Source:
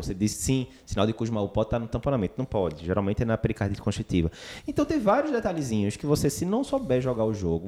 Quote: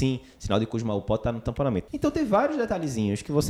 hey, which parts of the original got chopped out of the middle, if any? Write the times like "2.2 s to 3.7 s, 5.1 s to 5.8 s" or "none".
2.3 s to 4.6 s

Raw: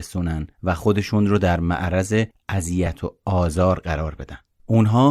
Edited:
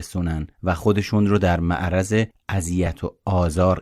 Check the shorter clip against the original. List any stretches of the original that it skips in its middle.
none

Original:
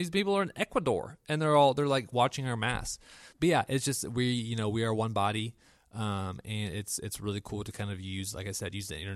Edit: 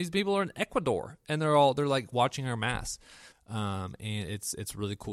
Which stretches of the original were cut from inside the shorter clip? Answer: 3.3 s to 5.8 s

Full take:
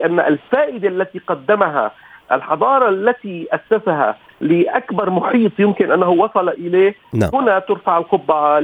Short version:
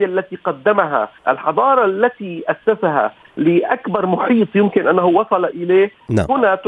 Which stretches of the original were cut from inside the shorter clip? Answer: 2.0 s to 2.2 s

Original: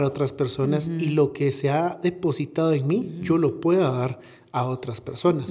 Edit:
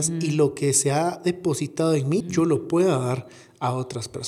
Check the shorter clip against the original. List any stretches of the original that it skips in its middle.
3.0 s to 3.1 s

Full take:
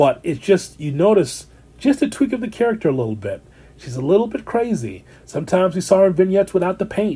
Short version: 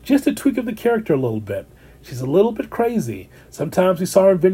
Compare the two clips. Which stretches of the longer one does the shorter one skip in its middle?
none

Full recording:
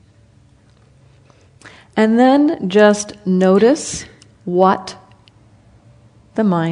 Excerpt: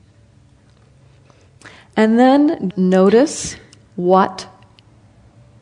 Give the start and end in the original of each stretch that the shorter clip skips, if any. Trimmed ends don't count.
2.7 s to 3.2 s

